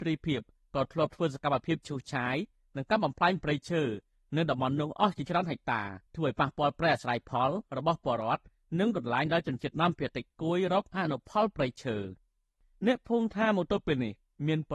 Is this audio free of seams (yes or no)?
no